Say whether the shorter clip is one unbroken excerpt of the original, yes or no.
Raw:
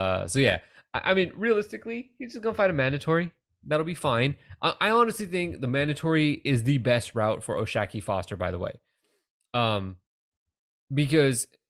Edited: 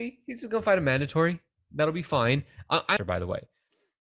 no